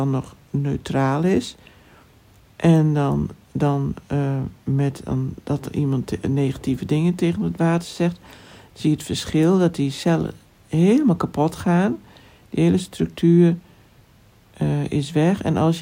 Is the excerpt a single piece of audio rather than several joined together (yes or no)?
yes